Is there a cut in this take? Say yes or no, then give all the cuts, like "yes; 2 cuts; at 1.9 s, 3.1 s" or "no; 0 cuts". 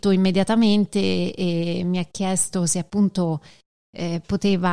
no; 0 cuts